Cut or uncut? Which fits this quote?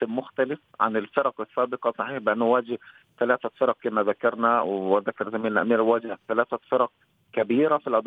uncut